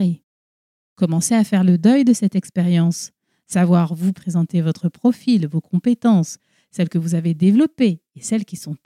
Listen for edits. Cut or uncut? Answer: cut